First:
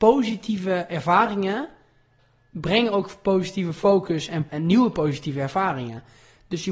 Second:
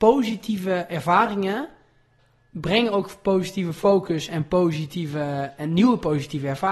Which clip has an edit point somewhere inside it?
first; 1 cut; at 4.5 s

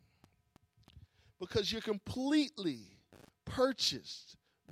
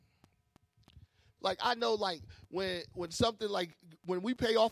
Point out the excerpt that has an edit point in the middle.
second; 1 cut; at 1.4 s

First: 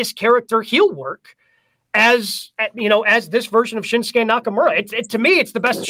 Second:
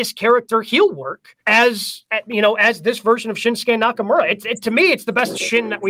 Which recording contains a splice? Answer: second; 1 cut; at 1.4 s

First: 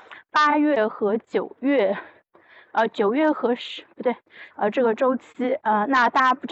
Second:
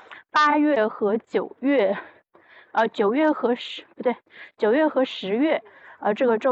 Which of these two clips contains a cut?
first; 1 cut; at 4.5 s

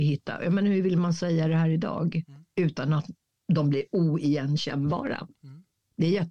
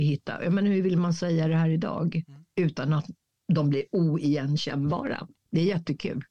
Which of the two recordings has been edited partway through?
second; 1 cut; at 5.4 s

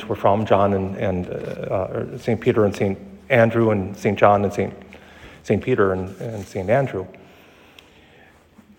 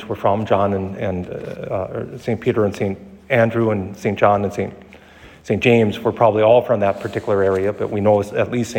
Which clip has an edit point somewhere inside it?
first; 1 cut; at 5.6 s

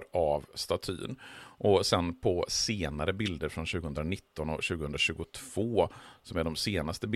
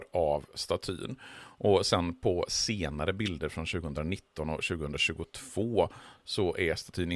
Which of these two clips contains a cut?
second; 1 cut; at 6.2 s

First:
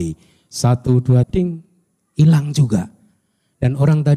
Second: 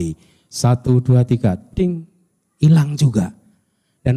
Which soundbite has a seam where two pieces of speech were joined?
first; 1 cut; at 1.2 s

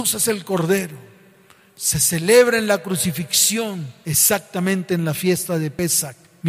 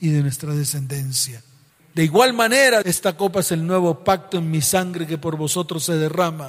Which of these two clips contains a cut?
second; 2 cuts; at 1.8 s, 2.8 s

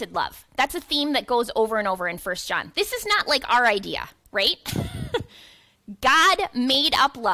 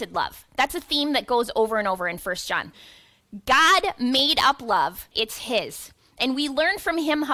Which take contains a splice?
second; 2 cuts; at 2.7 s, 5.1 s

